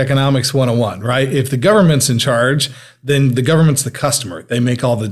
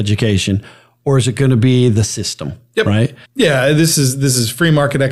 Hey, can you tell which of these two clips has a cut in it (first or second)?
second